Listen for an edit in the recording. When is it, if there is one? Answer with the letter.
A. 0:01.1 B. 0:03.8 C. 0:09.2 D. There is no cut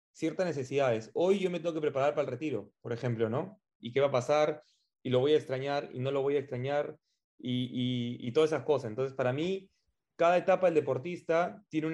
B